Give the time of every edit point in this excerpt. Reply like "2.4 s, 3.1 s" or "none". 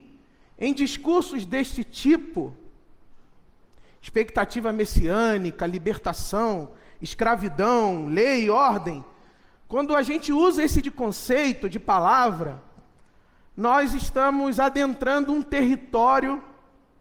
10.8 s